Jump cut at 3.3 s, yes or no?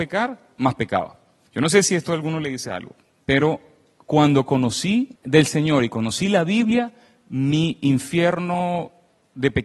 no